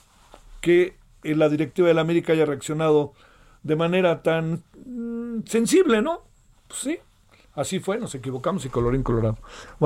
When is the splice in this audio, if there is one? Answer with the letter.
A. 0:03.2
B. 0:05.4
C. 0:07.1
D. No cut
D